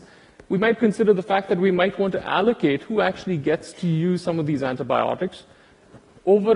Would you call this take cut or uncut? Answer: uncut